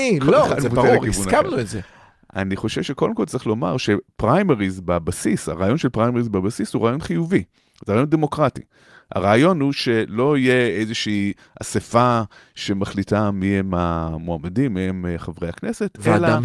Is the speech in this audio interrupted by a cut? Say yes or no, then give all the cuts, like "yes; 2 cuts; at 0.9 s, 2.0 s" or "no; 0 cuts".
no; 0 cuts